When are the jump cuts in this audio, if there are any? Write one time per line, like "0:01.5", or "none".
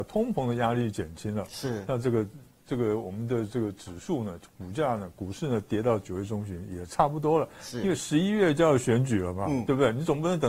none